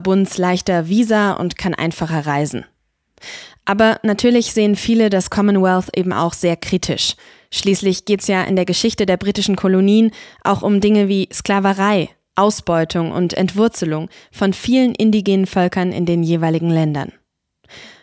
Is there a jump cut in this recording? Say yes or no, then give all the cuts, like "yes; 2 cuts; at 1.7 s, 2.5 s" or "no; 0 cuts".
no; 0 cuts